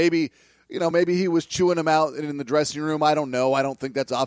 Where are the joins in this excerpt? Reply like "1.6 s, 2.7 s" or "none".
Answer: none